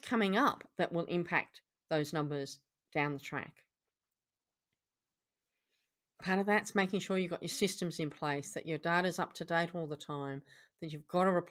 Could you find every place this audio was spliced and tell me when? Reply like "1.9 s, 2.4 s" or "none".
none

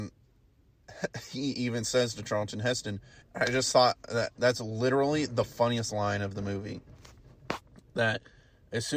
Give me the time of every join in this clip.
3.2 s

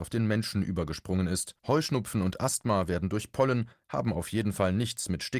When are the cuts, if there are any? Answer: 1.6 s, 3.7 s

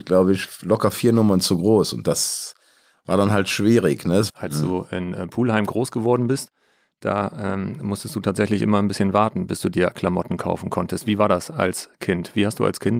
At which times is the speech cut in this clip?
4.3 s

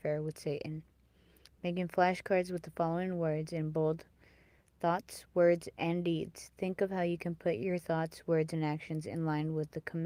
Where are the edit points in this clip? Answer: none

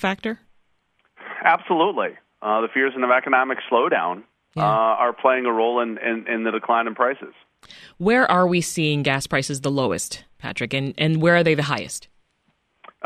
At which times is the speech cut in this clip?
none

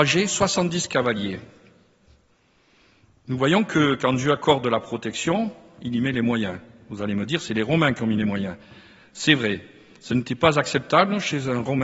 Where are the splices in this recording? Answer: none

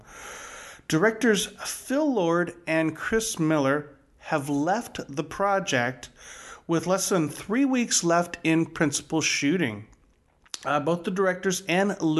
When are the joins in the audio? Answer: none

